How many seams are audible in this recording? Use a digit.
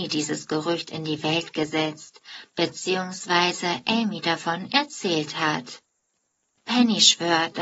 1